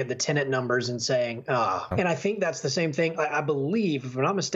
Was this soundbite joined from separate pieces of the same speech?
yes; 1 cut; at 1.9 s

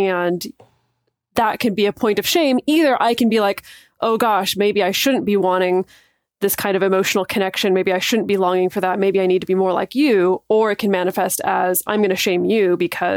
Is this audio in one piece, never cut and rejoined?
yes; 0 cuts

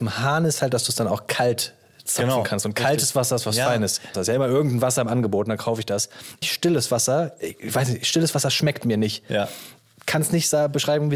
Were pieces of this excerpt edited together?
yes; 2 cuts; at 4.1 s, 6.4 s

